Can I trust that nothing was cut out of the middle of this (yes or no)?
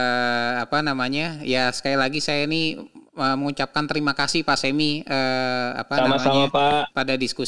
yes